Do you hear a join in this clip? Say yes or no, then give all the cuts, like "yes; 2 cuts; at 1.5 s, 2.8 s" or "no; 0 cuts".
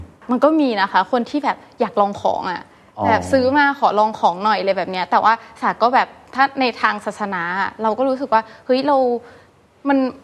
no; 0 cuts